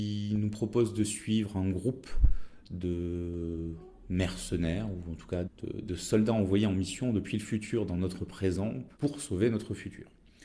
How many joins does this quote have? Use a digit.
2